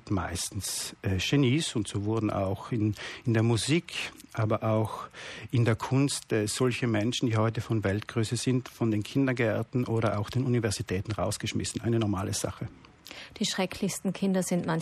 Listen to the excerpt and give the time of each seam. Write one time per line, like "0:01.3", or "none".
none

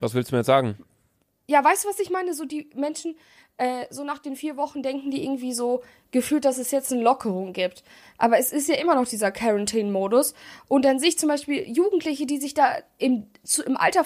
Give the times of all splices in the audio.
none

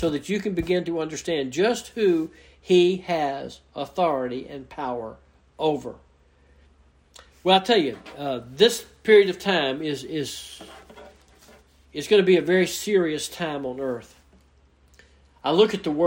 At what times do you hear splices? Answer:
none

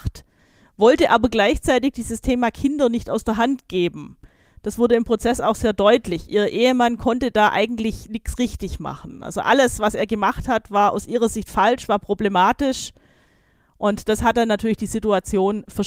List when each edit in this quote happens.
none

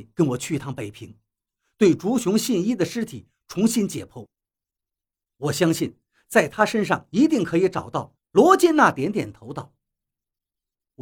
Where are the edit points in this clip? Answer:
0:08.1

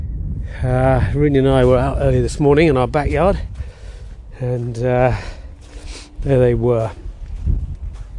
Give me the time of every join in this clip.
none

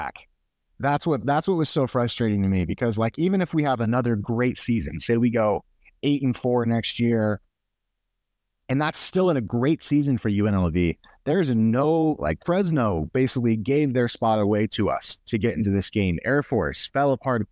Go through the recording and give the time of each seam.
none

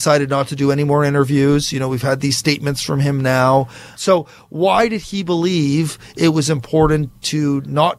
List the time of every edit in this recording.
0:03.9

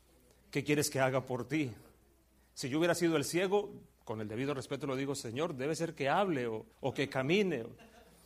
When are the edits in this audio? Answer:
0:06.7

